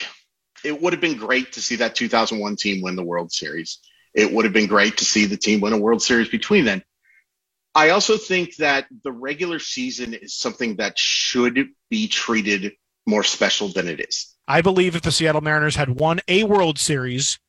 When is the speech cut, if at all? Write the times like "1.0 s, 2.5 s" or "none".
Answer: 14.4 s